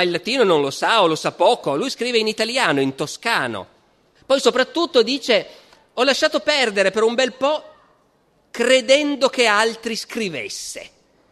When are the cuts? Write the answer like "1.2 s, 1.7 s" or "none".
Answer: 4.2 s